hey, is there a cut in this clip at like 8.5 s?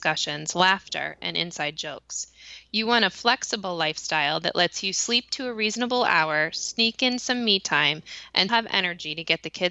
yes; 1 cut; at 8.5 s

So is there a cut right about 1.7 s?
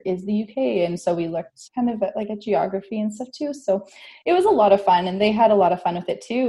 yes; 1 cut; at 1.7 s

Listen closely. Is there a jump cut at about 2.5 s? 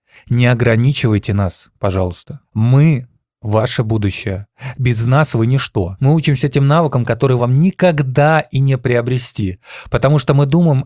no; 2 cuts; at 6.0 s, 7.4 s

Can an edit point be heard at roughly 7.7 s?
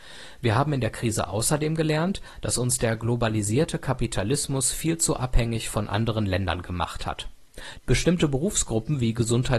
yes; 1 cut; at 7.7 s

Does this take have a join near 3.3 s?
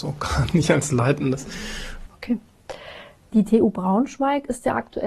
no; 1 cut; at 2.1 s

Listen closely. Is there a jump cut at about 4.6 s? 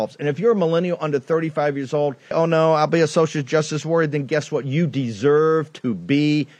no; 1 cut; at 2.3 s

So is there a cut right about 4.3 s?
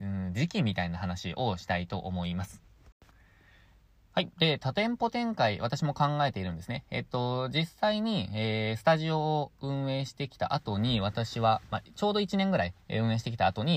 no; 0 cuts

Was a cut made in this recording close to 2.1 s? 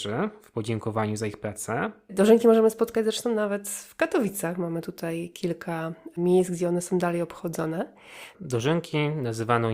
yes; 2 cuts; at 2.1 s, 8.3 s

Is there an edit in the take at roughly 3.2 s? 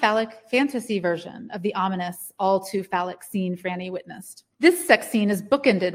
no; 1 cut; at 4.5 s

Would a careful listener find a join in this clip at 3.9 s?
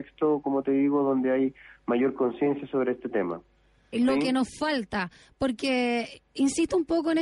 yes; 1 cut; at 3.9 s

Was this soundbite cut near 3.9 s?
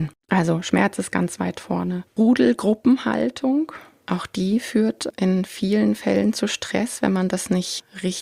no; 1 cut; at 2.1 s

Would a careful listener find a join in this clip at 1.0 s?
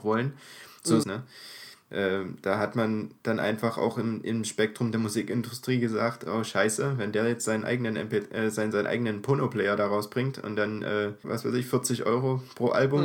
yes; 2 cuts; at 1.0 s, 11.2 s

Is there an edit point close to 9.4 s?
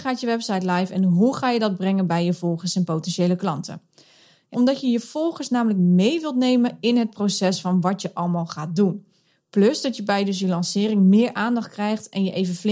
no; 1 cut; at 4.5 s

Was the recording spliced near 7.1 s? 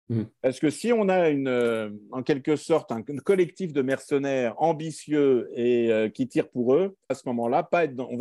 yes; 1 cut; at 7.1 s

